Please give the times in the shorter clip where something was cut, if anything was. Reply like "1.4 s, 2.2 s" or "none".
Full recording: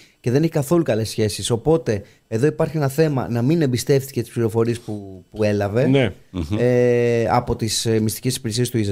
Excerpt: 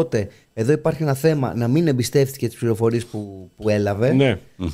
none